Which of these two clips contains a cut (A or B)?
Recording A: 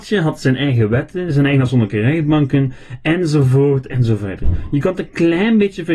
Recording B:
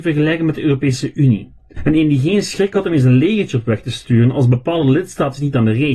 B